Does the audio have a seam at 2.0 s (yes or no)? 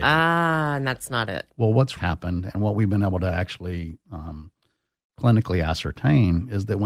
yes